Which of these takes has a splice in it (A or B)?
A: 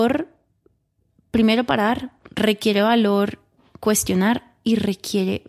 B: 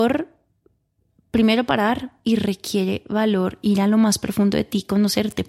B